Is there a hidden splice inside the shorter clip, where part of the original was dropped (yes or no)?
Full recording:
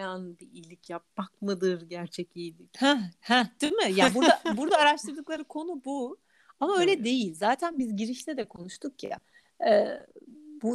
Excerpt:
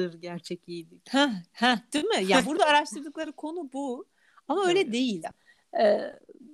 yes